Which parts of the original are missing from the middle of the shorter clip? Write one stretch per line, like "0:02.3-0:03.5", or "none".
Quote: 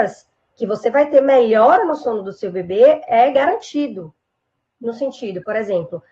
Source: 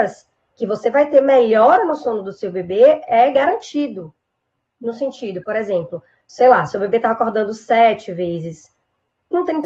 none